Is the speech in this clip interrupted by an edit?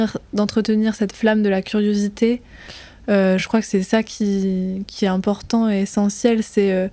no; 0 cuts

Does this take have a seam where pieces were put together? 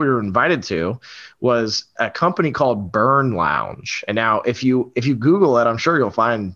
no; 0 cuts

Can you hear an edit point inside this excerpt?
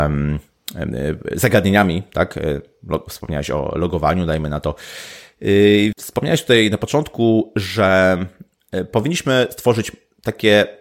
yes; 1 cut; at 5.9 s

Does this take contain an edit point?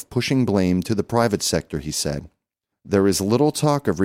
yes; 1 cut; at 2.7 s

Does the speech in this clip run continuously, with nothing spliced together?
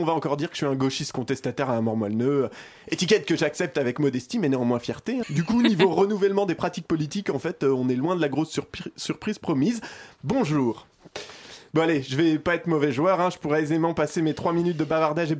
no; 1 cut; at 5.2 s

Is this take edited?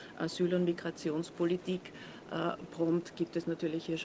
no; 0 cuts

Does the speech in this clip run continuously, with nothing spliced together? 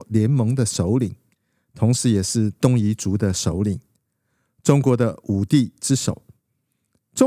yes; 0 cuts

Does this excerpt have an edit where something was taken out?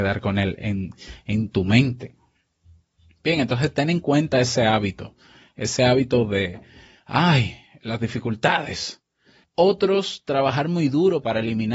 yes; 1 cut; at 9.4 s

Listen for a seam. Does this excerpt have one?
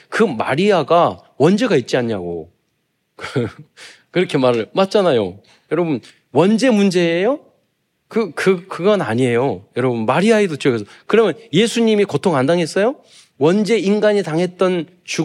no; 0 cuts

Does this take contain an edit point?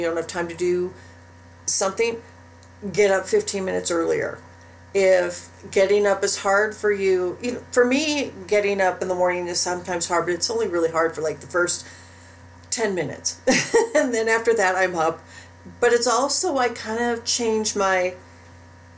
no; 0 cuts

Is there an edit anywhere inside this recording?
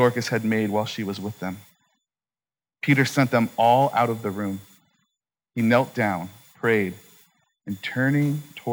no; 0 cuts

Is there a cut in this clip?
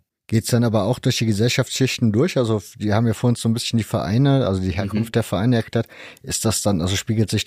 no; 0 cuts

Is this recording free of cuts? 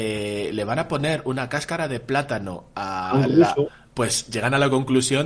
no; 1 cut; at 3.9 s

